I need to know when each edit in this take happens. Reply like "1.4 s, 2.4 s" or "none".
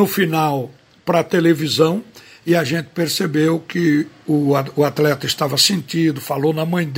none